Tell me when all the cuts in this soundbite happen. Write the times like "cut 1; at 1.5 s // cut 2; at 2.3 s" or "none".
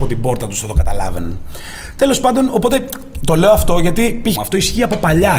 cut 1; at 4.4 s